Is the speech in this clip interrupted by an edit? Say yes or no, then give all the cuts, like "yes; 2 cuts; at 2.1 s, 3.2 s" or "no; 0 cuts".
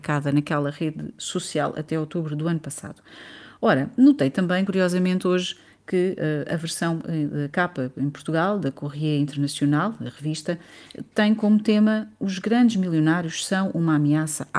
no; 0 cuts